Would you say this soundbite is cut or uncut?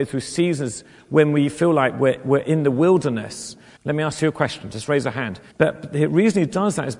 cut